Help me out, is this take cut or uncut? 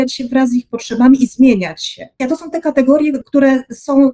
cut